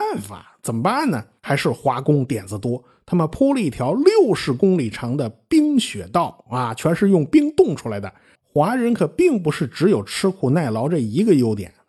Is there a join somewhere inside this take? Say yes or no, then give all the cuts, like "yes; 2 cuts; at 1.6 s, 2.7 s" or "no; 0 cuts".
yes; 1 cut; at 8.3 s